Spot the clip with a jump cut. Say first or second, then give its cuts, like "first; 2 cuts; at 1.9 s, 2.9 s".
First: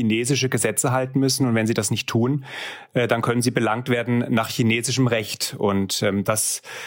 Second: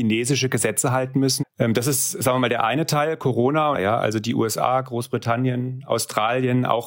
second; 2 cuts; at 1.4 s, 3.7 s